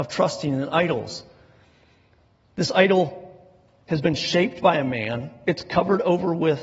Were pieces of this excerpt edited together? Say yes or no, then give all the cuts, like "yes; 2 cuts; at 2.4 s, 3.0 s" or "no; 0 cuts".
no; 0 cuts